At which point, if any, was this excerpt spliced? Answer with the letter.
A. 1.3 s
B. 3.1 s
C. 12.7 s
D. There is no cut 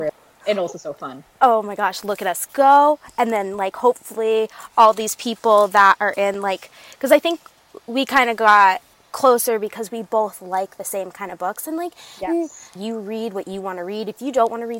C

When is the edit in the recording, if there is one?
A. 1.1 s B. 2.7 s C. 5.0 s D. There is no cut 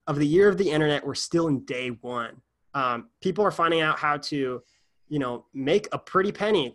B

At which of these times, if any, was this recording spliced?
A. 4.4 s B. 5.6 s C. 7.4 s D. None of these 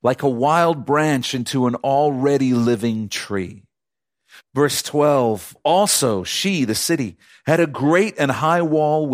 A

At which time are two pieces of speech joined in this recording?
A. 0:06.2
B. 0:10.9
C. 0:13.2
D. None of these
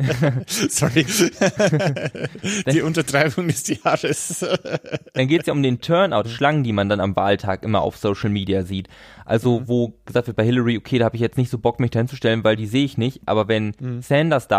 A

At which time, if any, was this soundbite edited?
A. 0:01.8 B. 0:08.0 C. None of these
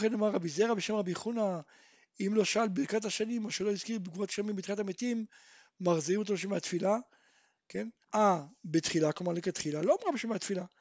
B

